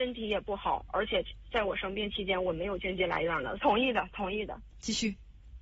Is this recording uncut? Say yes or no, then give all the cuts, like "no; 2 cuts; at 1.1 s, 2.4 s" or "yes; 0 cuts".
no; 2 cuts; at 3.6 s, 4.7 s